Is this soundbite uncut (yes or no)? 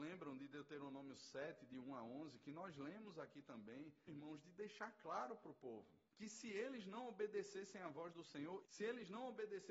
no